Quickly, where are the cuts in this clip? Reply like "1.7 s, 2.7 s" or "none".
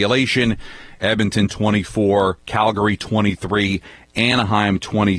1.0 s

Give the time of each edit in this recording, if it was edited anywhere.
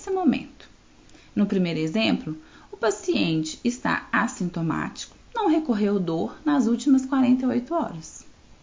none

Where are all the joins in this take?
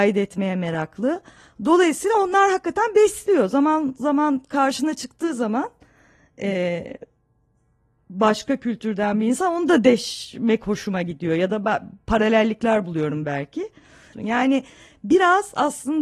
14.1 s

